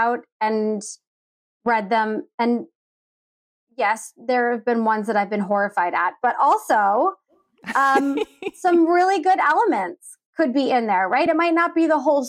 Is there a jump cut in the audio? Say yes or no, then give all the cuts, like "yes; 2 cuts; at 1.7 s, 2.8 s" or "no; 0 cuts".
no; 0 cuts